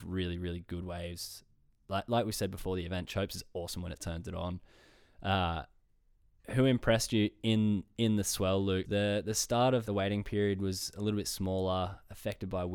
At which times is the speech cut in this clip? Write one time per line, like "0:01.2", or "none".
0:08.8
0:09.8